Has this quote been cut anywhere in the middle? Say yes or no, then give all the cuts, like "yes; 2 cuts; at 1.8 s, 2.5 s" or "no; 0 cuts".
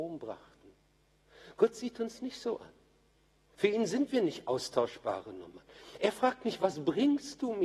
no; 0 cuts